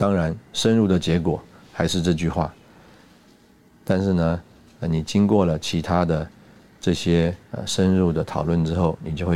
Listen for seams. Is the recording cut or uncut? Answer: cut